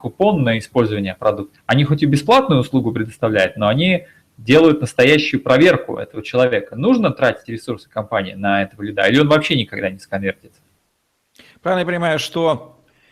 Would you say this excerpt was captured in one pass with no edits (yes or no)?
no